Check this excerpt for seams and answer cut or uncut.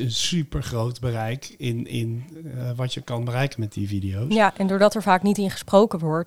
uncut